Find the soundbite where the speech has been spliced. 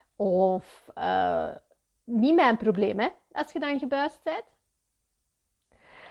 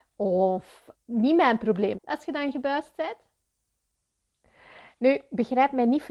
second; 2 cuts; at 0.9 s, 1.9 s

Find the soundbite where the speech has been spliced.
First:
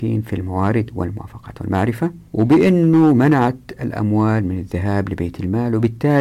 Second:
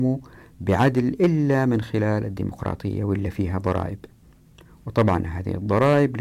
first; 1 cut; at 2.3 s

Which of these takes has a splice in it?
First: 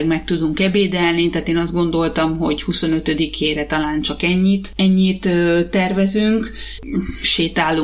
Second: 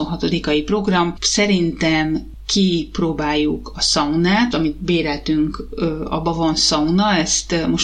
second; 2 cuts; at 1.2 s, 4.5 s

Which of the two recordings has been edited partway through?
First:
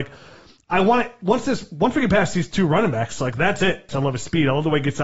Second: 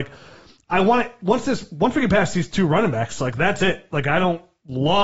first; 1 cut; at 3.9 s

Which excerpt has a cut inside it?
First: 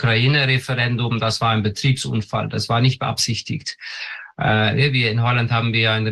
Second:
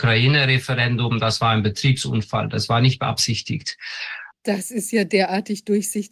second; 1 cut; at 4.3 s

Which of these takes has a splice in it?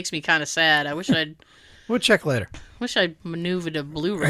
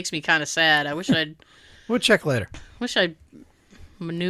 first; 1 cut; at 3.2 s

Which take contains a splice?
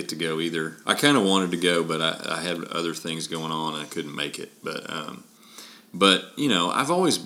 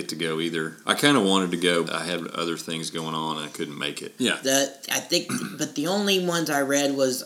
second; 2 cuts; at 1.8 s, 4.2 s

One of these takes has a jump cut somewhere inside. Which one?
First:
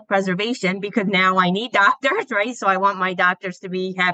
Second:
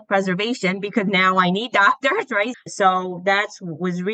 second; 1 cut; at 2.5 s

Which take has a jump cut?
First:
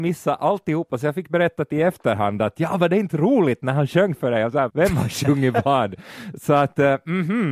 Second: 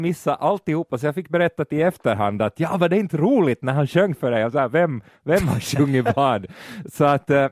first; 1 cut; at 4.7 s

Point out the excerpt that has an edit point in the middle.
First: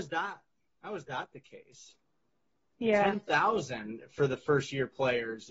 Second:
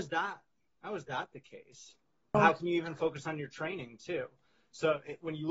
second; 1 cut; at 2.3 s

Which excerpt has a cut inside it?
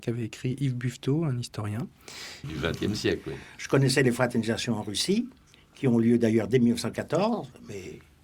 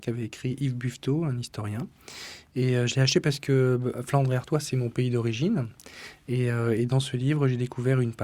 first; 1 cut; at 2.4 s

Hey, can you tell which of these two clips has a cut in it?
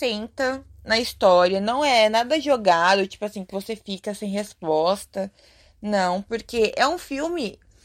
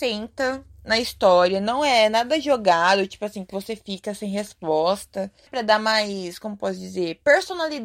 second; 1 cut; at 5.5 s

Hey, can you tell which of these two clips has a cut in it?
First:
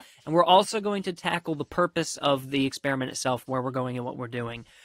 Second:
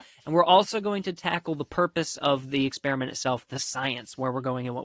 first; 1 cut; at 3.5 s

